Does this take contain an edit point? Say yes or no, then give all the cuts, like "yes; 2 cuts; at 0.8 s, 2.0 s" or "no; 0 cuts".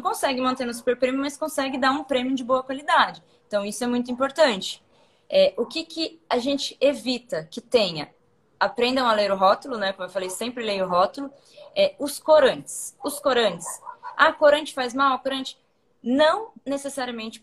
no; 0 cuts